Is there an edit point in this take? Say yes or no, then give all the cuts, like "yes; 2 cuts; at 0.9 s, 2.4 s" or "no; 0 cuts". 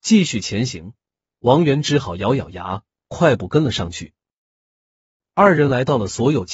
no; 0 cuts